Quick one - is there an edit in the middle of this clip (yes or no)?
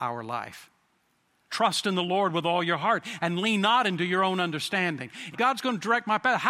yes